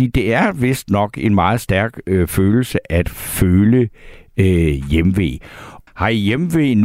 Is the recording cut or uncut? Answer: cut